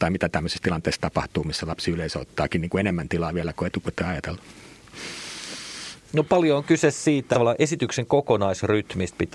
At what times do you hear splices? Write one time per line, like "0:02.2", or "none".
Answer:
0:06.0
0:07.3